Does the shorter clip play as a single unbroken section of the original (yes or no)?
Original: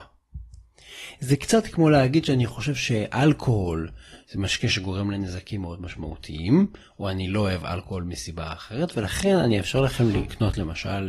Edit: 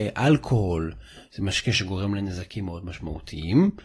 yes